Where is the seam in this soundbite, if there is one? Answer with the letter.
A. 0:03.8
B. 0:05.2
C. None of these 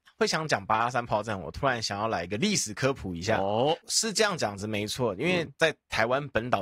A